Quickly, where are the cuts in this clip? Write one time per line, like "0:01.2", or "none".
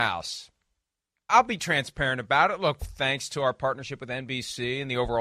0:01.3
0:02.8